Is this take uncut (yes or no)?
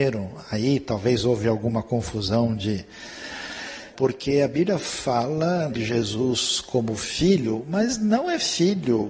no